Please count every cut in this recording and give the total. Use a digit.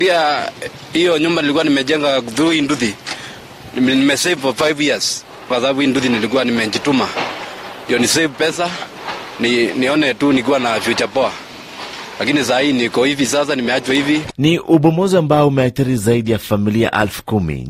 2